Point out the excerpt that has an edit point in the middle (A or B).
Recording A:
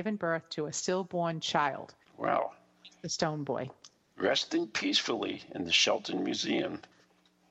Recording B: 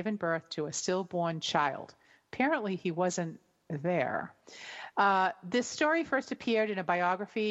A